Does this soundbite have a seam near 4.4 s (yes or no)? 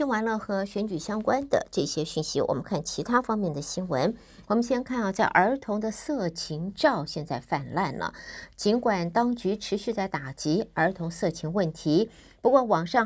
no